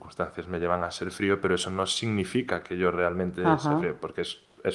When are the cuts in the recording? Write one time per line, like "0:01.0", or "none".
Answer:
none